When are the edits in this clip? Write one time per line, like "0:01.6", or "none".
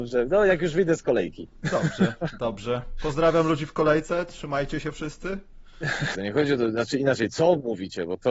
0:06.1